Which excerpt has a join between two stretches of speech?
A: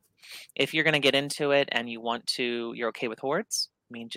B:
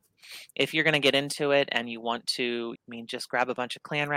B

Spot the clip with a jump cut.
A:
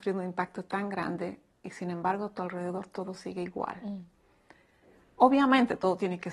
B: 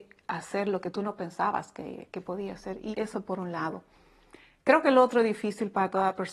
B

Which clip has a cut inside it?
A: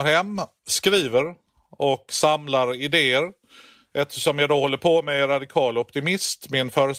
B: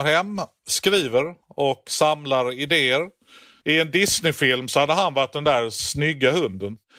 B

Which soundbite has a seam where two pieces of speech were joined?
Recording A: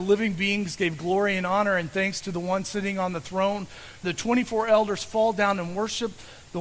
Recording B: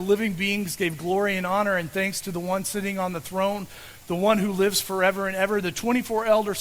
A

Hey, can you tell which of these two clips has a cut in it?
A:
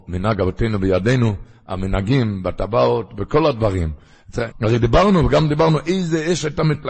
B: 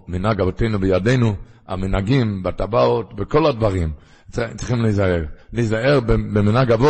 A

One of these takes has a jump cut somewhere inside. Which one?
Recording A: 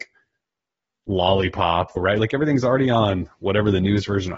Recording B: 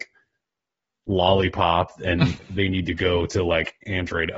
A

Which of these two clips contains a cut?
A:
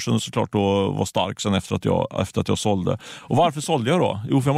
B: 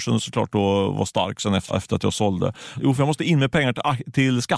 B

